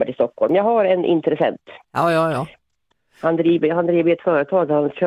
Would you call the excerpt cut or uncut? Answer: uncut